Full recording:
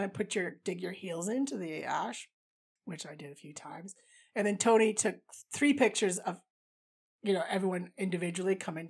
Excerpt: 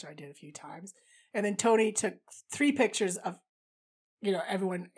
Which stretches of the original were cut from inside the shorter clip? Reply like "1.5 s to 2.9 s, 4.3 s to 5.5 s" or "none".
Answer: none